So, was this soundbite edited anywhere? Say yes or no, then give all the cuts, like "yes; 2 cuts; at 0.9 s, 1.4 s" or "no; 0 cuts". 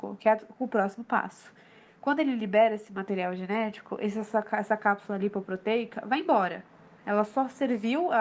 no; 0 cuts